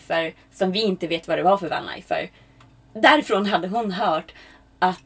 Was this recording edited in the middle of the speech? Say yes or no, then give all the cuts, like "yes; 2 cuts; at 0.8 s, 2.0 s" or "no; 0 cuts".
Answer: no; 0 cuts